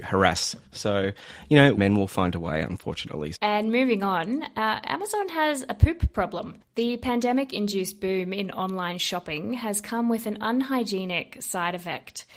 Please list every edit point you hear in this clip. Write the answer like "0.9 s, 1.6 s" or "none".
1.8 s, 3.3 s